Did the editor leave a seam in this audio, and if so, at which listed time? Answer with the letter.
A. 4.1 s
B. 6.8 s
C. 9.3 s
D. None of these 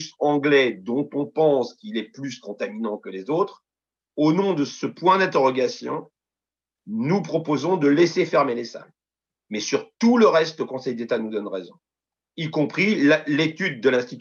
A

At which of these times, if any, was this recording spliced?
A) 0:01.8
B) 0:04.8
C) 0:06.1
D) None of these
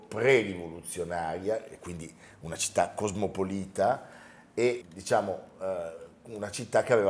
B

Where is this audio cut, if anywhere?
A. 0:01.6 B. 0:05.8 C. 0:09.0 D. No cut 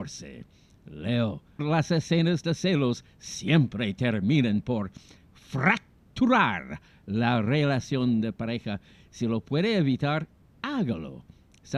A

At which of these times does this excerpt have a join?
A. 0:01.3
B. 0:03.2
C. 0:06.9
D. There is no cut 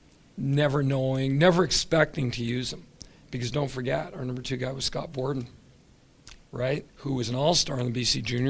C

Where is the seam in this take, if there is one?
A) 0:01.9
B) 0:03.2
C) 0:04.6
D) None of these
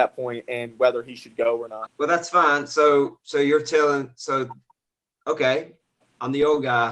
A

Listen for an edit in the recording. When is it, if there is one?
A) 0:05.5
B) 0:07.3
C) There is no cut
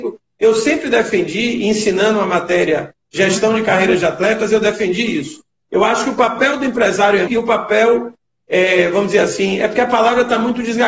B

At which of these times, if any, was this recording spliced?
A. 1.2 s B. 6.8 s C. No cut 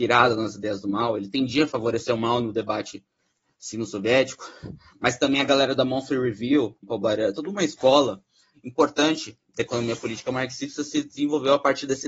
B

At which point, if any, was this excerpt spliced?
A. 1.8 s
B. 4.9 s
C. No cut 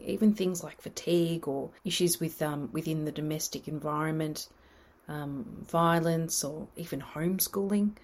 A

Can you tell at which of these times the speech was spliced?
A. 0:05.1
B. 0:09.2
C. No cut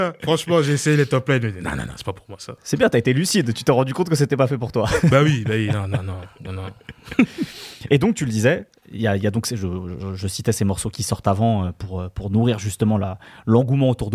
C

